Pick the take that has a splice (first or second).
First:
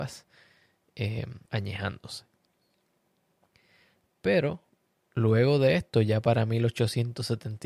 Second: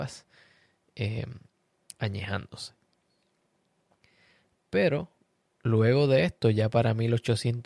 first